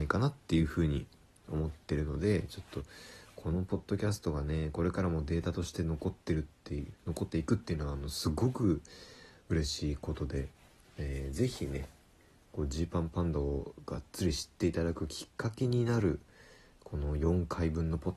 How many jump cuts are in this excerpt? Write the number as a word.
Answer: zero